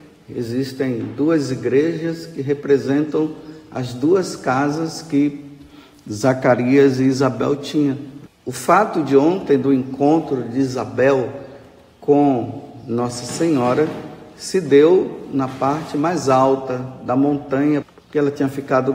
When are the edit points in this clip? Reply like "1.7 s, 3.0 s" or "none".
8.3 s, 17.8 s